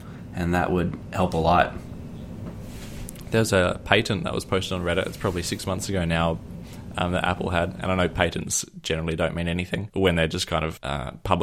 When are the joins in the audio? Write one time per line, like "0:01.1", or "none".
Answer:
none